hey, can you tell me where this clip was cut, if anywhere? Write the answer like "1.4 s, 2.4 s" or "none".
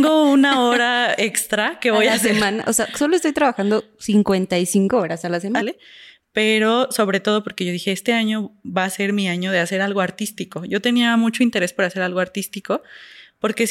5.6 s